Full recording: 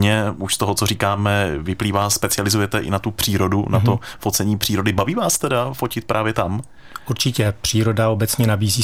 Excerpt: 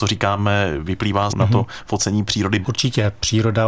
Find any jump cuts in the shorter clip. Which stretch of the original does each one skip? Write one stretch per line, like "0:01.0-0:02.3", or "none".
0:02.1-0:03.6
0:04.9-0:07.0